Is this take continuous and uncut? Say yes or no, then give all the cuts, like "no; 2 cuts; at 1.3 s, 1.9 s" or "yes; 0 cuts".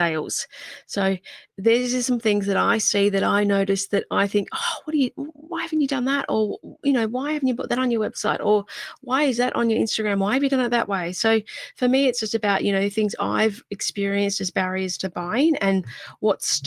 yes; 0 cuts